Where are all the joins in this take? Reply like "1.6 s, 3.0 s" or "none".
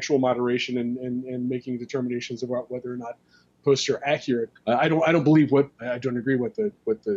4.6 s, 5.7 s